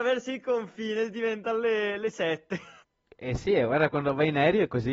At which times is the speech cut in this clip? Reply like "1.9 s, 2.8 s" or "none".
none